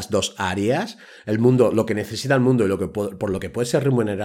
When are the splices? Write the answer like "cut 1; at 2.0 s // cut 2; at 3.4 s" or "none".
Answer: none